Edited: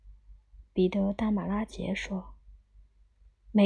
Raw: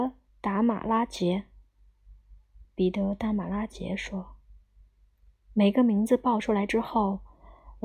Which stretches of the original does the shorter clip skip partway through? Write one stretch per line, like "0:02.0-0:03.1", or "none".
none